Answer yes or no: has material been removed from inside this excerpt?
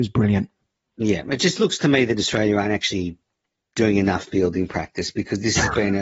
no